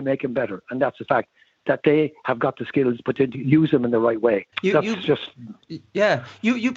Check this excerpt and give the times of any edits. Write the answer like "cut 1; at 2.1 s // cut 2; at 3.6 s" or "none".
cut 1; at 4.5 s